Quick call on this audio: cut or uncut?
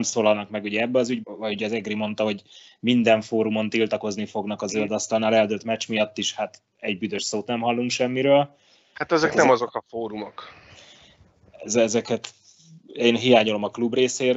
cut